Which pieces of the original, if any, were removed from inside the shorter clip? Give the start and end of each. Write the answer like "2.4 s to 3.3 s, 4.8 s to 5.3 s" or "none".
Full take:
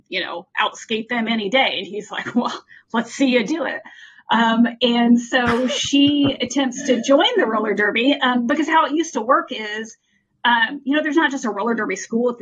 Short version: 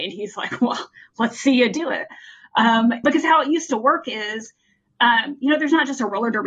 4.8 s to 8.5 s

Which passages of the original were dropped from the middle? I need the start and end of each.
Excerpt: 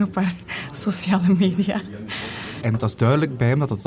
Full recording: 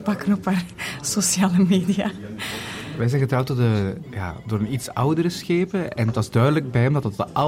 2.9 s to 5.9 s

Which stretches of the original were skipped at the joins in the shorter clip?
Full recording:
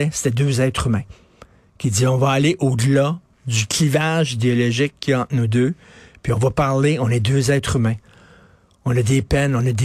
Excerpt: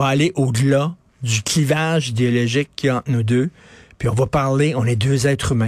none

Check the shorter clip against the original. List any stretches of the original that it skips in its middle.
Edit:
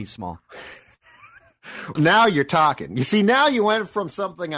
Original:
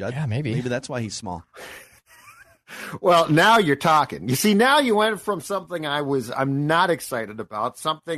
3.0 s to 3.3 s

